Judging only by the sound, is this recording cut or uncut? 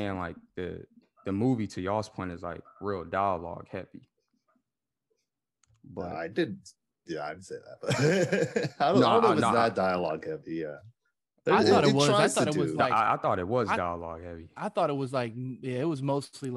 uncut